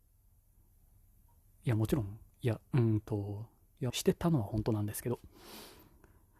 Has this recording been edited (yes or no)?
yes